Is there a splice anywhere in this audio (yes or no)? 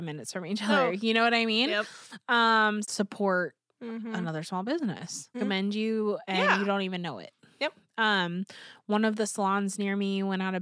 yes